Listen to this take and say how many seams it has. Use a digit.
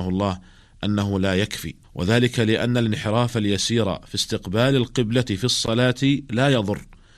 1